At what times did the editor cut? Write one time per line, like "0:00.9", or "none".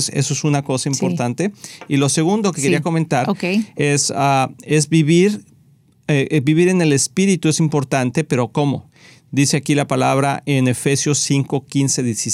none